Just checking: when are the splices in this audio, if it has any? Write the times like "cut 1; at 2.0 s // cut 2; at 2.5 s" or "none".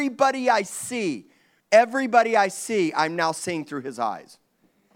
cut 1; at 1.6 s